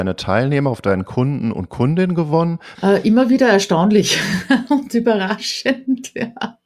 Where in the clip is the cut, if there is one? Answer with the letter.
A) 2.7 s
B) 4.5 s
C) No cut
A